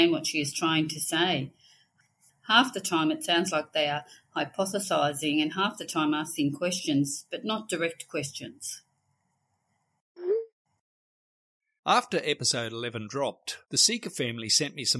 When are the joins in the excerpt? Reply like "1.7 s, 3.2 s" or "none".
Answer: 13.6 s